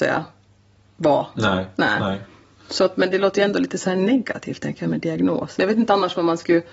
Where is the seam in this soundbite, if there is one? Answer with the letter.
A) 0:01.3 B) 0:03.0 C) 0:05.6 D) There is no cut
C